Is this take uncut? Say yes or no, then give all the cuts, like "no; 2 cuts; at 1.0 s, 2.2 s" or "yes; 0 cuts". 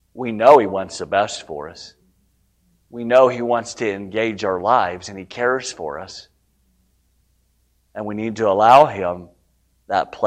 yes; 0 cuts